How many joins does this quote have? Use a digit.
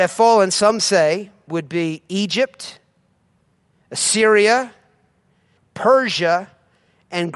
2